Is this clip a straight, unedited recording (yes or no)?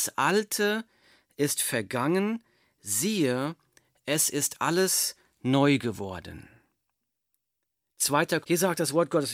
no